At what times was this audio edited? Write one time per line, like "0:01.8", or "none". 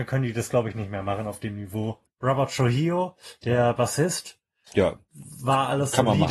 0:02.1
0:04.7